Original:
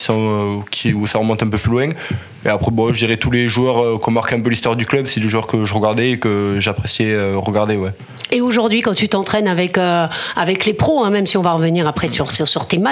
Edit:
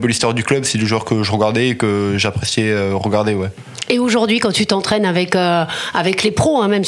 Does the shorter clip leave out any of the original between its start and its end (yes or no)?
no